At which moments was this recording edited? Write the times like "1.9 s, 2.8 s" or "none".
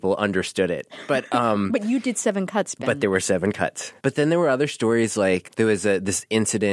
4.0 s, 5.4 s